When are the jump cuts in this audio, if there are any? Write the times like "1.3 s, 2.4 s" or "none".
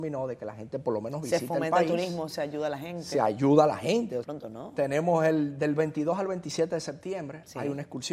4.2 s